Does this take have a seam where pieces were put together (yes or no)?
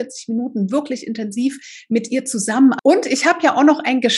yes